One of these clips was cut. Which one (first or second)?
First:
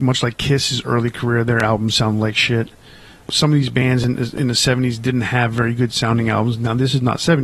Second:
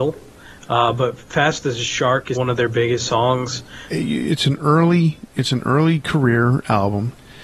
second